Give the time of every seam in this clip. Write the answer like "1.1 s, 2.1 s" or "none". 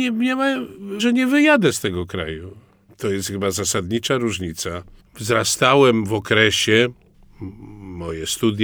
1.0 s, 5.0 s